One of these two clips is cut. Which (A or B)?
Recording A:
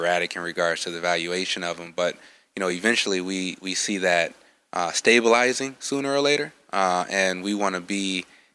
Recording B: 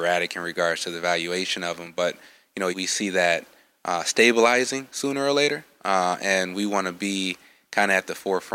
B